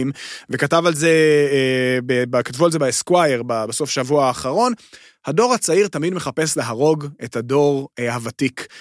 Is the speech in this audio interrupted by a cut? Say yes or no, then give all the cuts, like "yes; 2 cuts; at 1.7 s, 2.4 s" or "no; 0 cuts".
no; 0 cuts